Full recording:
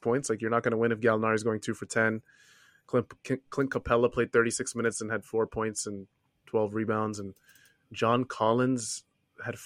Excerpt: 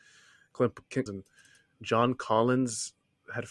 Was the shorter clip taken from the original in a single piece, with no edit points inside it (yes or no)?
no